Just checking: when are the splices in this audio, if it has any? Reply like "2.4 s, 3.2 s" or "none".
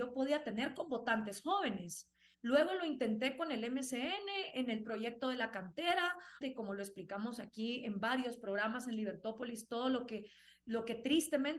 2.3 s, 6.4 s